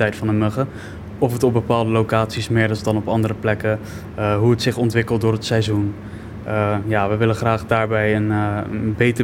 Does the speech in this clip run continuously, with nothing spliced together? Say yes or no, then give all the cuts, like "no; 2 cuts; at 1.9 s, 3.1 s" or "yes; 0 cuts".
yes; 0 cuts